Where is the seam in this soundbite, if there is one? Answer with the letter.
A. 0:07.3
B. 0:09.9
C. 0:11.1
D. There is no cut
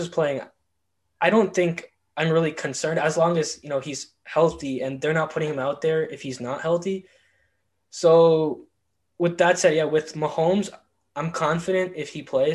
D